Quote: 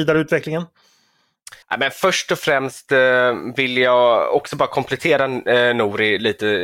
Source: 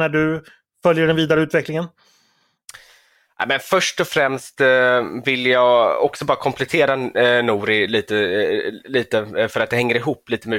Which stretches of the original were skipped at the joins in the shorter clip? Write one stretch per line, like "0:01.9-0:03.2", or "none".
0:02.8-0:03.3